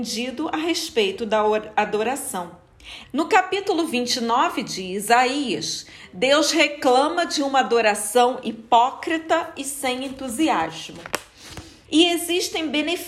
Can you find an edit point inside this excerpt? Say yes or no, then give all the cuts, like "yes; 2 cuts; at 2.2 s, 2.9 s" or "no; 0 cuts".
yes; 2 cuts; at 3.0 s, 11.8 s